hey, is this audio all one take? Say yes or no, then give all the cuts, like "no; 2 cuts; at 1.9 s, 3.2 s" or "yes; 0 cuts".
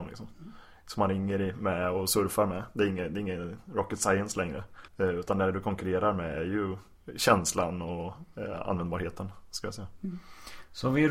no; 1 cut; at 4.9 s